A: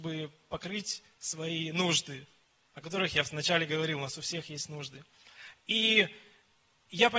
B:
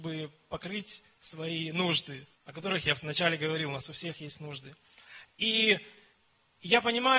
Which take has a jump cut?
B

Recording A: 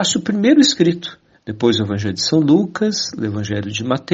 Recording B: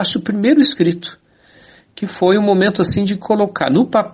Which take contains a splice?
A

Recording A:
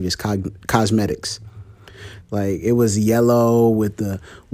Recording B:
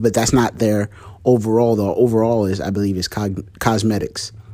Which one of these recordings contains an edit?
A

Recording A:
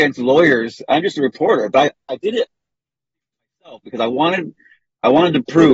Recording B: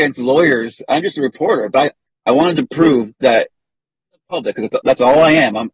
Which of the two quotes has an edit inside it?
B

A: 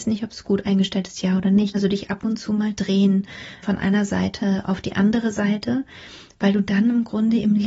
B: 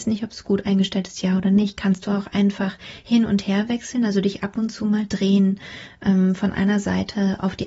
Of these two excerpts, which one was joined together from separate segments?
A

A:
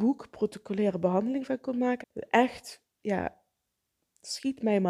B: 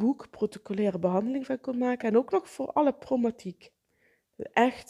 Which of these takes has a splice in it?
A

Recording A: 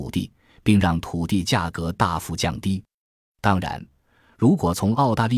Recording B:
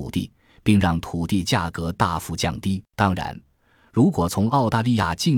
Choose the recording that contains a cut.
B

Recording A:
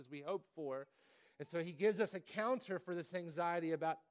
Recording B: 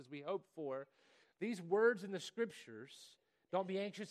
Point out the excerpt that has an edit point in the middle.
B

